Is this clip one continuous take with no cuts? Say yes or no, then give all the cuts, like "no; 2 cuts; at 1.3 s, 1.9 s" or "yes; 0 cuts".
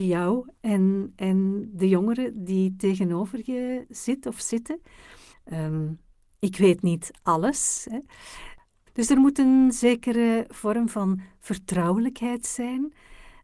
no; 2 cuts; at 5.3 s, 8.9 s